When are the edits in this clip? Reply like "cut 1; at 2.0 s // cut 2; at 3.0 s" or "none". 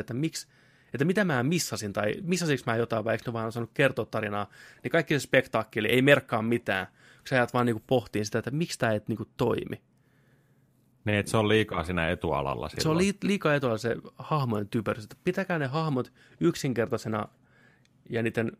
none